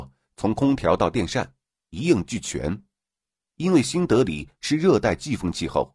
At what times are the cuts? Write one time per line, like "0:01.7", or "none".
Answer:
0:03.5